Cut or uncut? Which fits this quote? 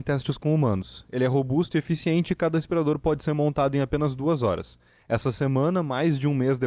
uncut